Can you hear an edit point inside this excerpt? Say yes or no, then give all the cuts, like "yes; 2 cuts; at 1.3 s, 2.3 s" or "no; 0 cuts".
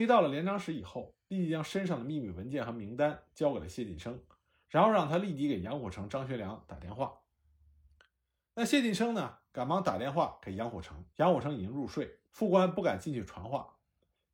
yes; 2 cuts; at 11.1 s, 12.3 s